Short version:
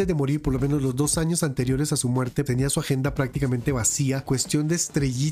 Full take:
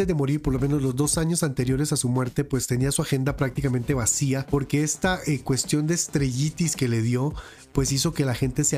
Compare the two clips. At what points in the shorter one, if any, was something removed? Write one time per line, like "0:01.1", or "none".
0:02.5
0:04.2